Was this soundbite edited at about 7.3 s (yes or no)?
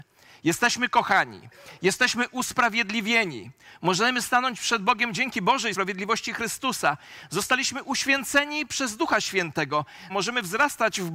no